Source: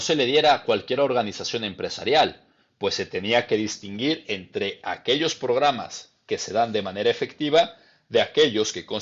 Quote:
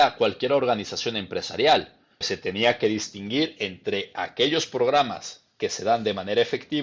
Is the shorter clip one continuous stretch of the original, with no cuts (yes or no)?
no